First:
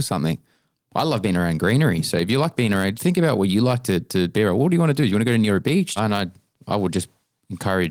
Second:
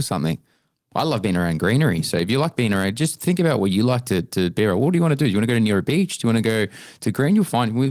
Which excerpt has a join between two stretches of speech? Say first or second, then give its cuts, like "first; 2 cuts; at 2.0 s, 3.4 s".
first; 2 cuts; at 2.9 s, 6.0 s